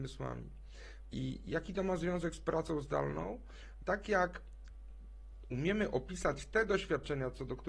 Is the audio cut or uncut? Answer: cut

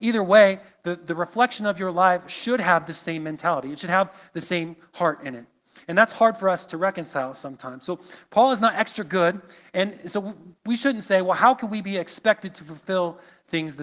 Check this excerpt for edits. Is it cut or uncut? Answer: cut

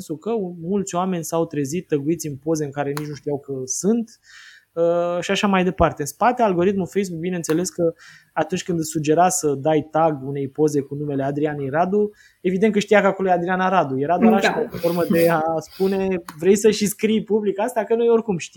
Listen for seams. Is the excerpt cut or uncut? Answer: uncut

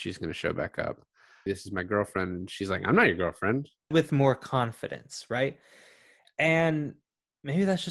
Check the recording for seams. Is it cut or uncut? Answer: cut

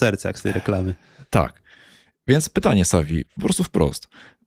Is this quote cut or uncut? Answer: uncut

